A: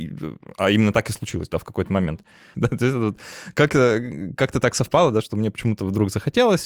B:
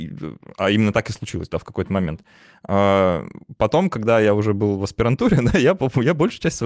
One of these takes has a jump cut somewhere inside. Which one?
A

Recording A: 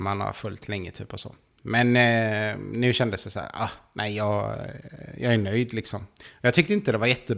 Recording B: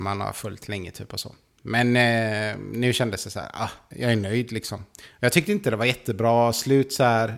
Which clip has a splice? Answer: B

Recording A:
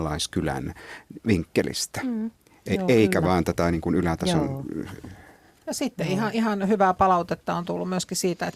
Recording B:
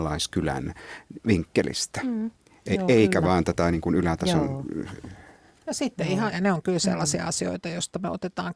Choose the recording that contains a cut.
B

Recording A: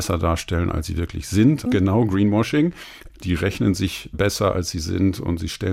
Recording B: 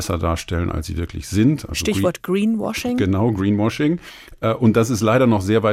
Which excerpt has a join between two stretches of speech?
A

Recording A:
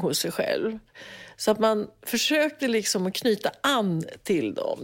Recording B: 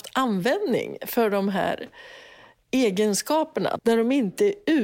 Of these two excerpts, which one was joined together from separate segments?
B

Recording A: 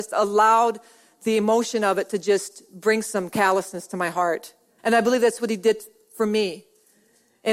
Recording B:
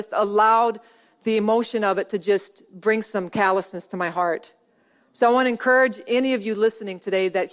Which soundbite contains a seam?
A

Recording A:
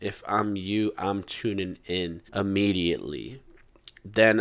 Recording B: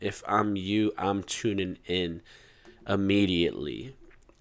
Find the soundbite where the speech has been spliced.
A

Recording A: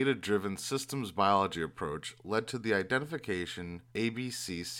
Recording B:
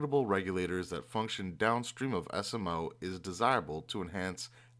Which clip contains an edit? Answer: A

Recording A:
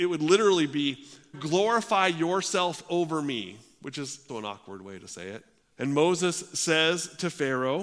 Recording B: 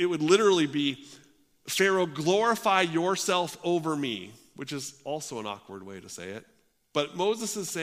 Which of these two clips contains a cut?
A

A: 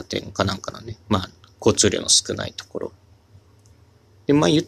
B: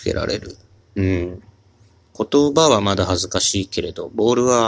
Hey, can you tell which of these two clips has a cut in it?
B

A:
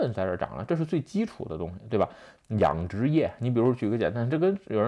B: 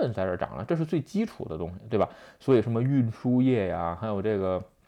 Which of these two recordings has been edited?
A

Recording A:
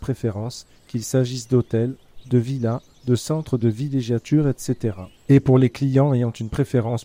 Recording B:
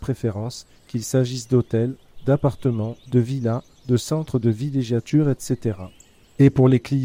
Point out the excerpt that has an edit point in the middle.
A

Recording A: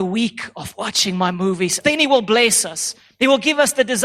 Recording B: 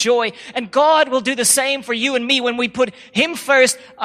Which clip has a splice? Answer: A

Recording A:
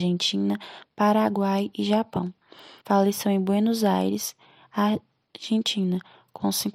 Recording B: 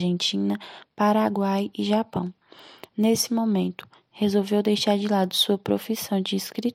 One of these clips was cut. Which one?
A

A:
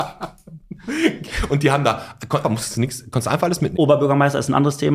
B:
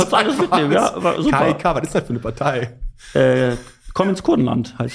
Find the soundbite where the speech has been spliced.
A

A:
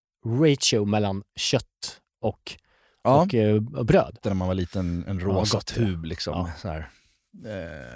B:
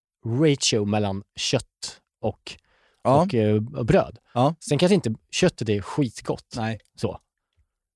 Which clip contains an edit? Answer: A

